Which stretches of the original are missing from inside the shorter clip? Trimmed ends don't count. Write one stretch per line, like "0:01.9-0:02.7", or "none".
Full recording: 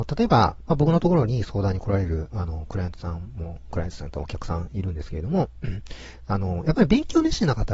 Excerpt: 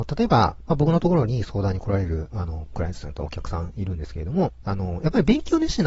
0:02.7-0:03.6
0:05.6-0:06.3